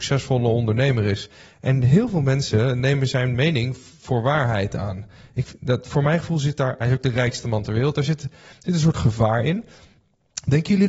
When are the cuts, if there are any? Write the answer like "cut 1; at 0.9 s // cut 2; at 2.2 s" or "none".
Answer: none